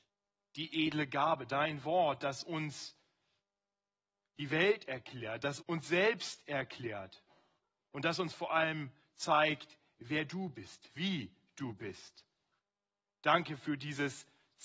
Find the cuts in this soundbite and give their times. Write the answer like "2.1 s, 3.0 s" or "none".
5.6 s